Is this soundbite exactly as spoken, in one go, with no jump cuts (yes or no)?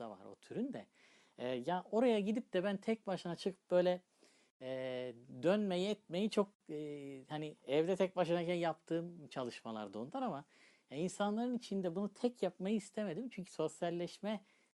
yes